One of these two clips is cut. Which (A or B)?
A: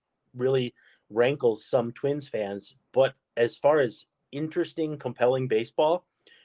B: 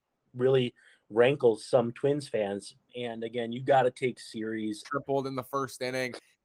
B